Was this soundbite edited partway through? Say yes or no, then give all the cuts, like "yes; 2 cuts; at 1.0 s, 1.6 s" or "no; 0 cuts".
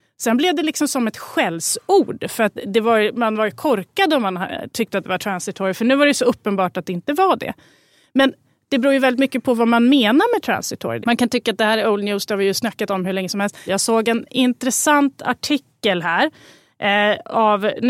yes; 2 cuts; at 11.0 s, 13.7 s